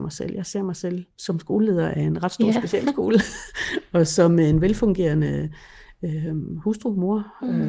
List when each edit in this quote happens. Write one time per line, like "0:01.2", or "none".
none